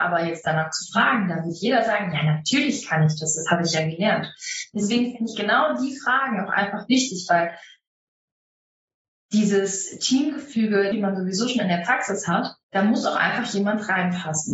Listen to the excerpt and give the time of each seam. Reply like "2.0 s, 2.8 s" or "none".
10.9 s, 12.6 s